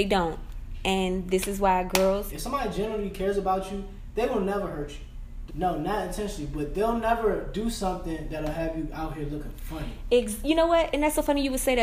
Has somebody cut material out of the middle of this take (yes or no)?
yes